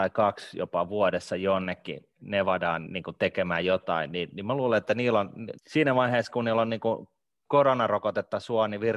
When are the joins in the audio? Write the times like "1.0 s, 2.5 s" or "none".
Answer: 2.9 s, 5.6 s